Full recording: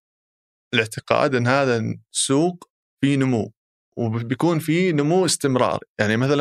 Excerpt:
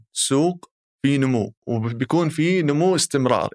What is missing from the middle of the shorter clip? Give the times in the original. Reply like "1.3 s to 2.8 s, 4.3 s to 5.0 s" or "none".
3.6 s to 3.9 s